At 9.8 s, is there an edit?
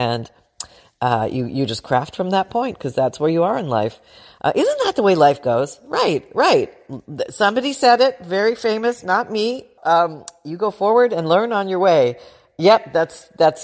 yes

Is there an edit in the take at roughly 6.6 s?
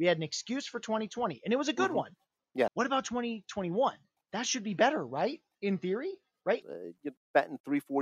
yes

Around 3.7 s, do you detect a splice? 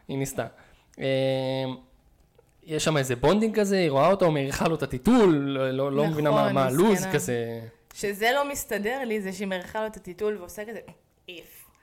no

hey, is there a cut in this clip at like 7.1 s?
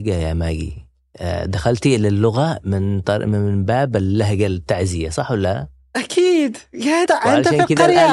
yes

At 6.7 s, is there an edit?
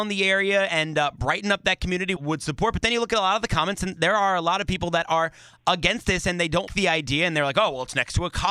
yes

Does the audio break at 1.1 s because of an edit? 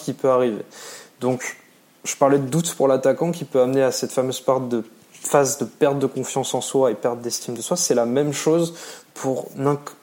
no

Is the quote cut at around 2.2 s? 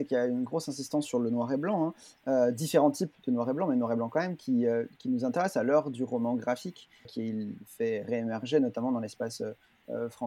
no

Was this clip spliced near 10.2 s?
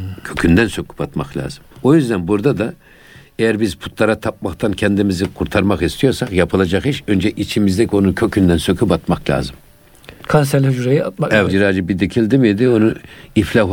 no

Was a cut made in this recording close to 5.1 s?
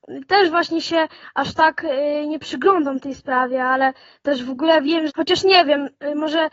yes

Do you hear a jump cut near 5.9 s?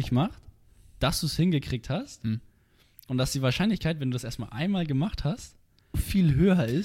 yes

